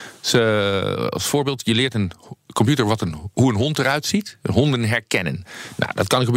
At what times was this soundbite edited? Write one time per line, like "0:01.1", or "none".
none